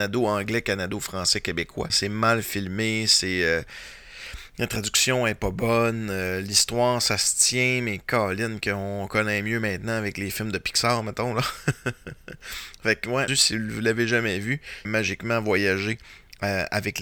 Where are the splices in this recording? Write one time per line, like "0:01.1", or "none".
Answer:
0:01.9
0:13.3
0:14.8